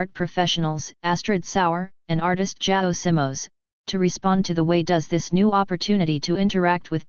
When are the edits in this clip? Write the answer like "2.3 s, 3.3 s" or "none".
1.9 s